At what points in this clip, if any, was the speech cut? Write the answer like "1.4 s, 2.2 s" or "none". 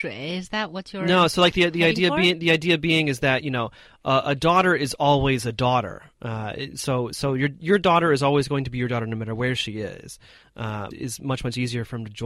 10.9 s

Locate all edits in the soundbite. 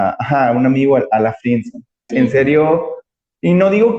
2.1 s

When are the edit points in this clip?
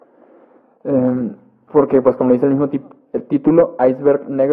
none

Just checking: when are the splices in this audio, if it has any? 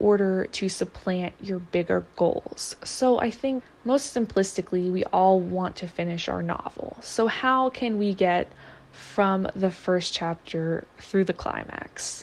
none

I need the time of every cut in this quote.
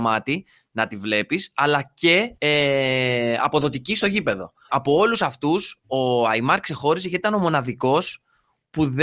2.4 s, 4.7 s

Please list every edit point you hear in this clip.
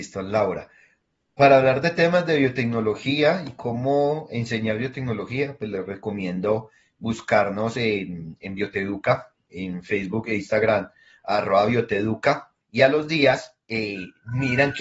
12.6 s

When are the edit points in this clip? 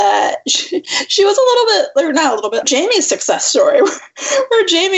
2.6 s

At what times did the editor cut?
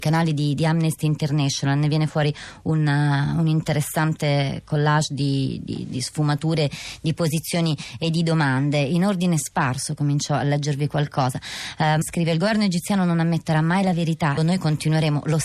12.0 s, 14.4 s

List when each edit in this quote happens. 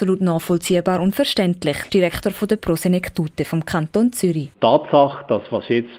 1.9 s, 4.5 s

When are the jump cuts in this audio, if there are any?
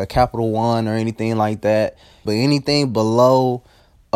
2.2 s

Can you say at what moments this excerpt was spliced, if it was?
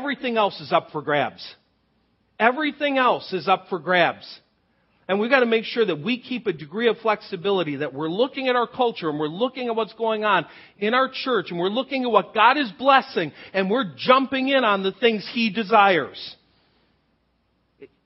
none

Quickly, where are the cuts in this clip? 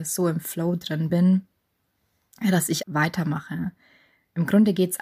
1.1 s, 2.8 s

